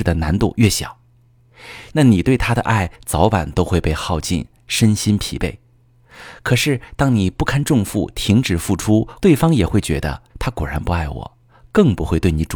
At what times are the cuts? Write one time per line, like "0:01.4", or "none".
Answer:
0:01.9
0:09.2
0:10.3